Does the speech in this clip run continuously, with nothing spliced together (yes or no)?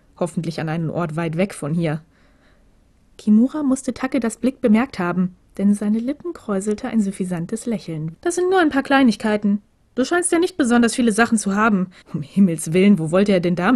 no